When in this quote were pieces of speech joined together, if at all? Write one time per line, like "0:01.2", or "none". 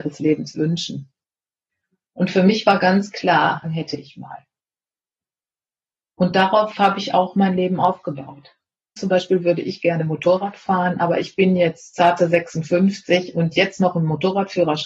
0:03.6
0:09.0